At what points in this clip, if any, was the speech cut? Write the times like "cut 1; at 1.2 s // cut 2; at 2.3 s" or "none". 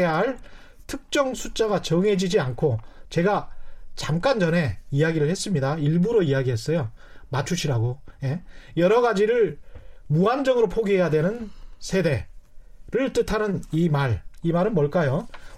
none